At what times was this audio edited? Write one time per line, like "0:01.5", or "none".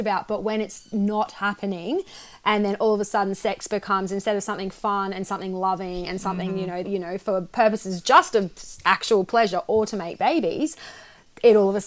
0:06.8